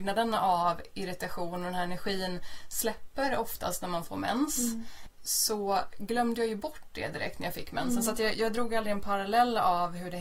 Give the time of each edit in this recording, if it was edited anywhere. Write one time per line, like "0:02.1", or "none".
0:08.3